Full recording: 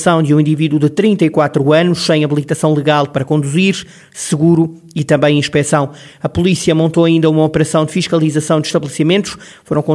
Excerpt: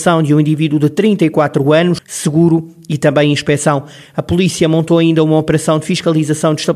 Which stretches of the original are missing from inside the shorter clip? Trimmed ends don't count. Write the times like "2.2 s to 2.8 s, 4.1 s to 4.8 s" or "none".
2.0 s to 4.0 s